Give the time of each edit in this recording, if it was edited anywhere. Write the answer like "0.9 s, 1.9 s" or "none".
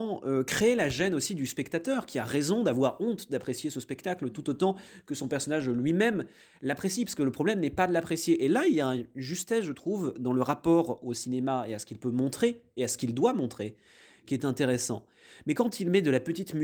none